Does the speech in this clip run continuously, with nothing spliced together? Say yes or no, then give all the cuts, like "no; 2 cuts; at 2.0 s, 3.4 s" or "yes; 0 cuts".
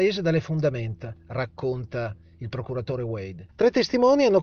no; 1 cut; at 3.5 s